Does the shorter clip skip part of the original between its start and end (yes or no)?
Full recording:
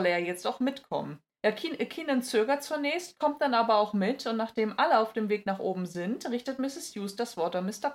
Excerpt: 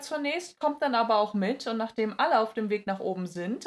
no